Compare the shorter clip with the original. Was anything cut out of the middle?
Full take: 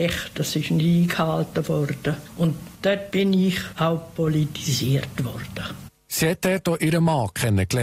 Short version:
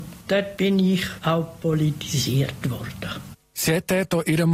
no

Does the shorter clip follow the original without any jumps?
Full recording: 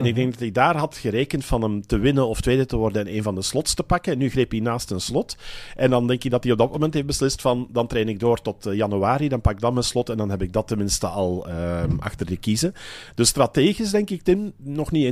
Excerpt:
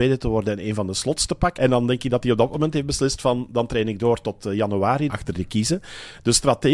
no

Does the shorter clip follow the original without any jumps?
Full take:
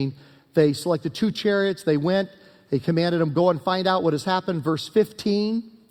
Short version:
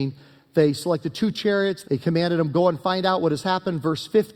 no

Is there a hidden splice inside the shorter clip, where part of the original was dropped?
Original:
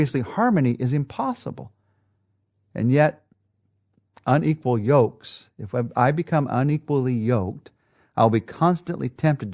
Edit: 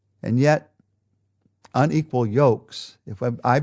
no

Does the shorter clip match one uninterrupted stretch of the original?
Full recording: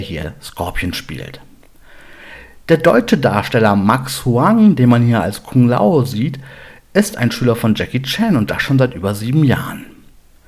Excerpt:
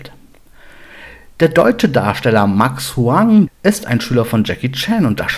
no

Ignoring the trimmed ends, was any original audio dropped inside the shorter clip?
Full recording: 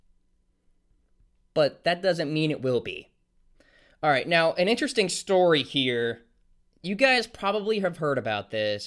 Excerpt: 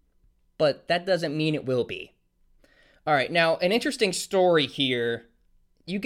no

